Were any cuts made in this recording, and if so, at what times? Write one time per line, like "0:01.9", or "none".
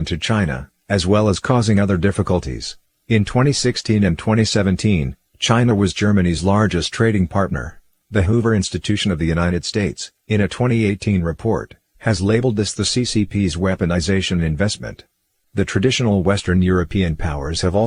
0:02.9
0:08.0
0:15.4